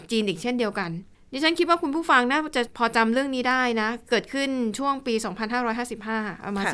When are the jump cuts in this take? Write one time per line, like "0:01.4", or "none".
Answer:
none